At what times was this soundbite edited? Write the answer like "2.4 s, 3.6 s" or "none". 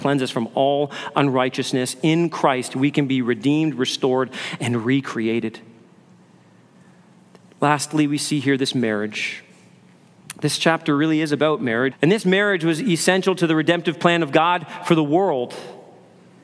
11.9 s